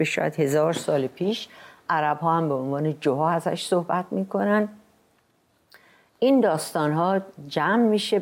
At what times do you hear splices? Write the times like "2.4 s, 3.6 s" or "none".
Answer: none